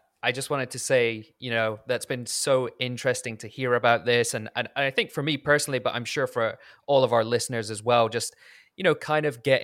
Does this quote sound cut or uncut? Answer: uncut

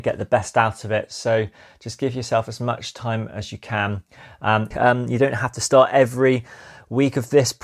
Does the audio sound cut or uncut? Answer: cut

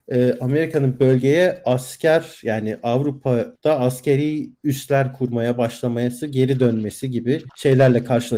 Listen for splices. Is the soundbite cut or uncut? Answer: uncut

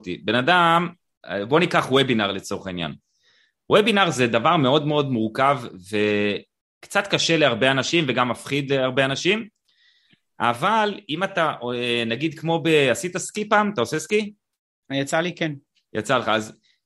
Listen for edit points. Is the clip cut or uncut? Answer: uncut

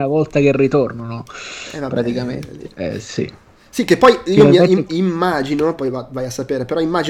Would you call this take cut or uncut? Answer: cut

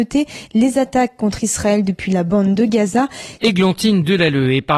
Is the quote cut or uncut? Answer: cut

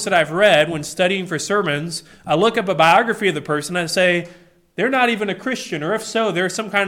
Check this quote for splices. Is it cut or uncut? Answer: uncut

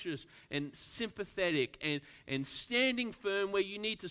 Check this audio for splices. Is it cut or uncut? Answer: uncut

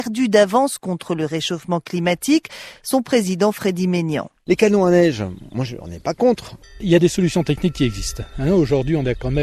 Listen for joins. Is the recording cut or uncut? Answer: cut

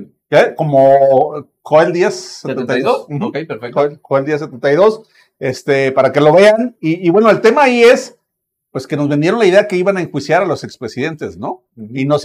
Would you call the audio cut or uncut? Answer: uncut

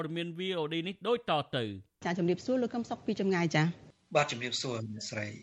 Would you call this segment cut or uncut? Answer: uncut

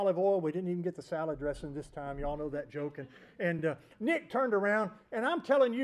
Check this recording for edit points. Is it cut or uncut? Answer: uncut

